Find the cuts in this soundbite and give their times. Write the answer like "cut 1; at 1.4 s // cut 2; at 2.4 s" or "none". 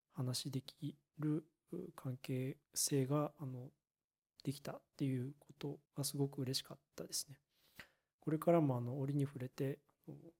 cut 1; at 2.6 s // cut 2; at 5.9 s